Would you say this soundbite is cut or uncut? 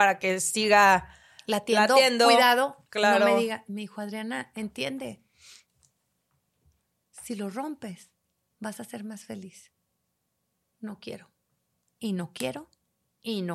uncut